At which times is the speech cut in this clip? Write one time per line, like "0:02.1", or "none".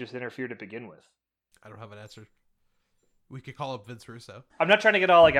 0:04.5